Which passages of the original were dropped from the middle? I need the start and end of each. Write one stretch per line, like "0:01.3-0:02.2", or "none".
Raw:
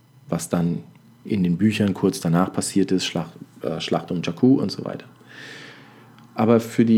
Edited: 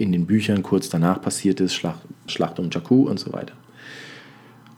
0:03.6-0:03.8